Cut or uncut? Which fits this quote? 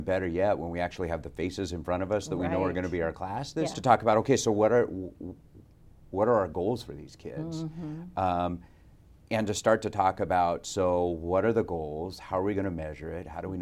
cut